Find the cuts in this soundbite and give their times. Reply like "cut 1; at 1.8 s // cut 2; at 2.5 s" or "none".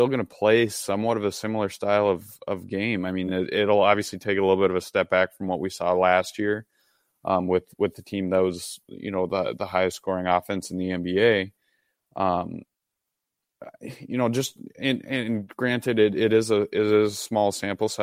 none